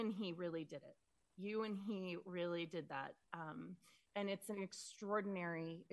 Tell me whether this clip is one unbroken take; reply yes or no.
yes